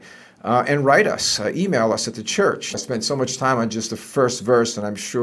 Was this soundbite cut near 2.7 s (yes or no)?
yes